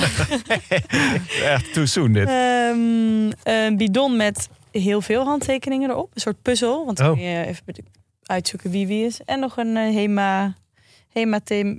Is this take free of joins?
yes; 0 cuts

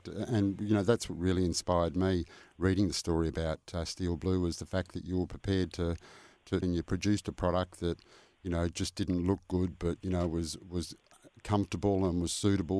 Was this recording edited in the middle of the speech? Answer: yes; 1 cut; at 6.6 s

